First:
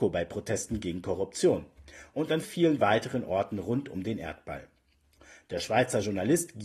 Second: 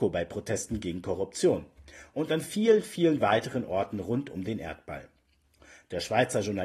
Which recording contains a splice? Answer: first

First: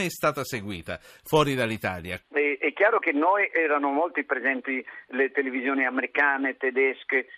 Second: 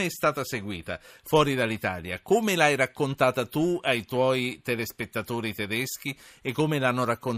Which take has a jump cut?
first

